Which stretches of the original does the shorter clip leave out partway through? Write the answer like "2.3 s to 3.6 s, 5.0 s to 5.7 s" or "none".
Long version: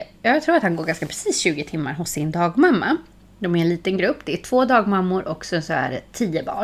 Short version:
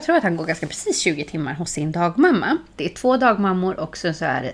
3.2 s to 4.2 s